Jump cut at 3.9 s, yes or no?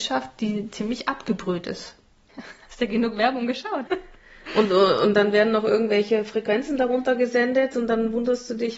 yes